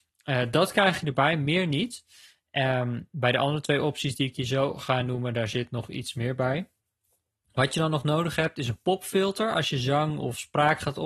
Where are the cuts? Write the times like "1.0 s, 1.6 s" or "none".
none